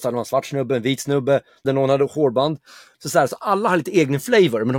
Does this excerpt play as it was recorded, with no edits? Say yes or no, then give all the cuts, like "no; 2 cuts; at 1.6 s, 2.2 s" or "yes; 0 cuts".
no; 2 cuts; at 1.6 s, 2.9 s